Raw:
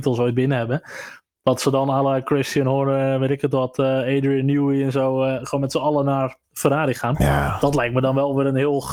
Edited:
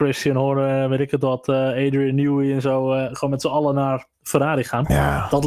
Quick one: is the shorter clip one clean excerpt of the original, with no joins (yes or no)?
yes